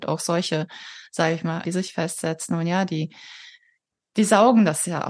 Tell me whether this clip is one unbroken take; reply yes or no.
no